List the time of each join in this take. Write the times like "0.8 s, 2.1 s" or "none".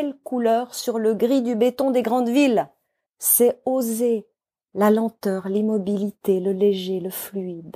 3.1 s